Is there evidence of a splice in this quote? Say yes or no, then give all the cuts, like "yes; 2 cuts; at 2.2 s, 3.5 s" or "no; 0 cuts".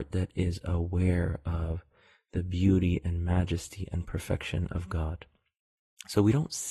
no; 0 cuts